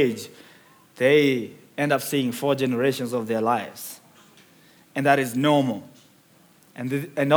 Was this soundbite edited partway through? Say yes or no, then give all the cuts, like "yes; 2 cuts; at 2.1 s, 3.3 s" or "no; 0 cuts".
no; 0 cuts